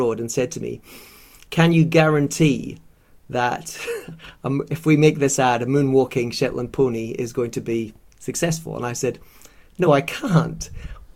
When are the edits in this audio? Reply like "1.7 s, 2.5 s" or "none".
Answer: none